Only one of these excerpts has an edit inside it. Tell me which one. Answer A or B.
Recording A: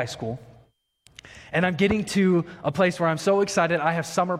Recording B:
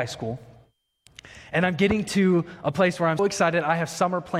B